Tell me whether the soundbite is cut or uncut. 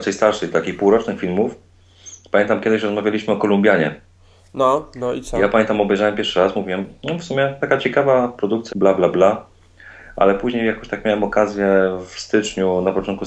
cut